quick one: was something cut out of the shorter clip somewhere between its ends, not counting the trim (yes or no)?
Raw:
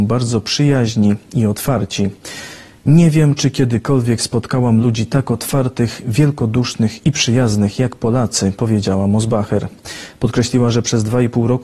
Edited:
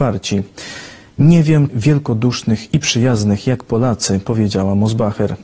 yes